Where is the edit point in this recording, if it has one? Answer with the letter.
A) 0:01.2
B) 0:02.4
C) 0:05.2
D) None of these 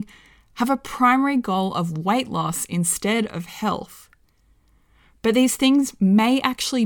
D